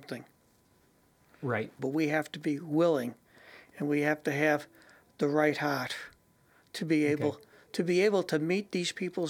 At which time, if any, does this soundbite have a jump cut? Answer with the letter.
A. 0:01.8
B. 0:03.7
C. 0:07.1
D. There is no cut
A